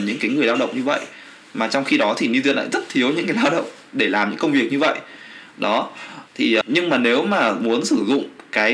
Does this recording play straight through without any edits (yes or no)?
no